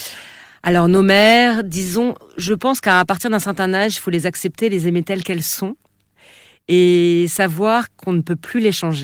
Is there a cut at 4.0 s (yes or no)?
no